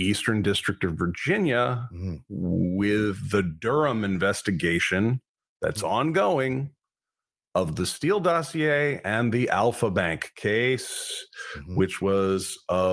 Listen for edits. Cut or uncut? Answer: uncut